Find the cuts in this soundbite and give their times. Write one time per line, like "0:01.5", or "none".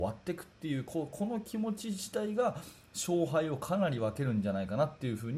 none